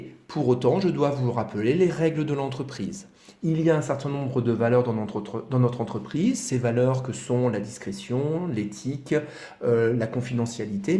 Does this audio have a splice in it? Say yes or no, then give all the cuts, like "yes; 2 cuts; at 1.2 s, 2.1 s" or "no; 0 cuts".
no; 0 cuts